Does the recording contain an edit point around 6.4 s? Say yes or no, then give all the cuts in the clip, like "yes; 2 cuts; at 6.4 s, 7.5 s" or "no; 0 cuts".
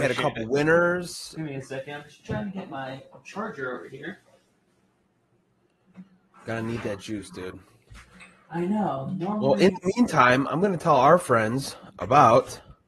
no; 1 cut; at 1.3 s